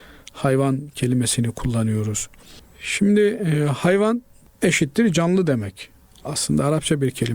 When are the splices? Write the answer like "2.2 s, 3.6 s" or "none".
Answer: 2.6 s